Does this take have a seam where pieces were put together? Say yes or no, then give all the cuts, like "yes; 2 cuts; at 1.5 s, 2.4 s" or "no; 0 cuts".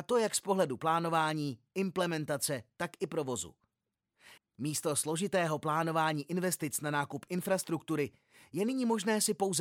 yes; 1 cut; at 4.4 s